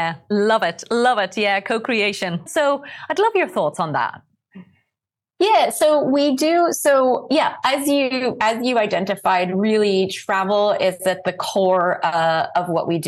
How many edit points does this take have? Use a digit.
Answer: 1